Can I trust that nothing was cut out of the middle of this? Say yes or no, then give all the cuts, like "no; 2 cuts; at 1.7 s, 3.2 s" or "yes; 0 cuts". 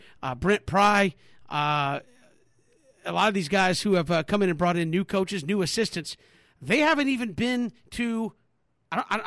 yes; 0 cuts